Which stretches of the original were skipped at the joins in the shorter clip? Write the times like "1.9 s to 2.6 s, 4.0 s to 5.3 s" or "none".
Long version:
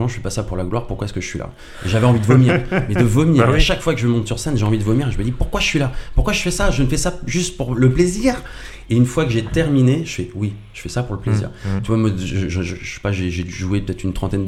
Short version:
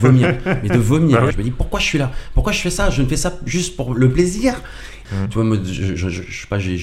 3.6 s to 5.1 s, 8.9 s to 11.6 s